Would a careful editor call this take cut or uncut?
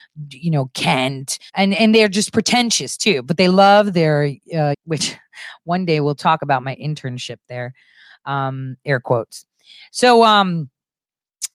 cut